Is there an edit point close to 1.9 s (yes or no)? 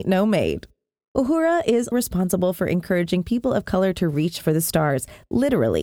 yes